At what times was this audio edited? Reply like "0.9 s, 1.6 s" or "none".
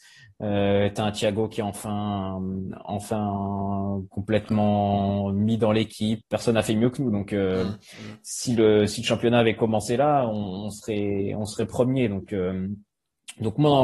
6.2 s